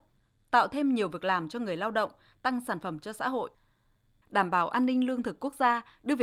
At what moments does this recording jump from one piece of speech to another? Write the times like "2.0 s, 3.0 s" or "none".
4.2 s